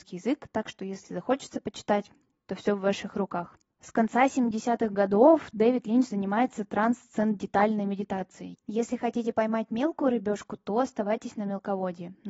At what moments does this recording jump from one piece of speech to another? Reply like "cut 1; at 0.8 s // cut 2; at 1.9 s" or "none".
cut 1; at 3.7 s // cut 2; at 8.5 s